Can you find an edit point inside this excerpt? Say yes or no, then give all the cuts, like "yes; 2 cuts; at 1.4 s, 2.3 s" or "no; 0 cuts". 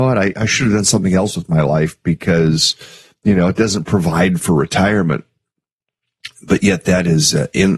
no; 0 cuts